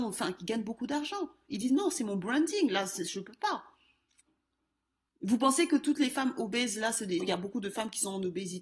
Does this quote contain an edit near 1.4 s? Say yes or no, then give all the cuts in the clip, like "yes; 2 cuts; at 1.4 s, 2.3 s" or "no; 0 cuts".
no; 2 cuts; at 5.1 s, 7.2 s